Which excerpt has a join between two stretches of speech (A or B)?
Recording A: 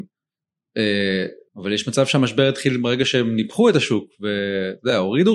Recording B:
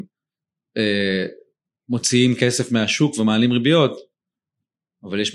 A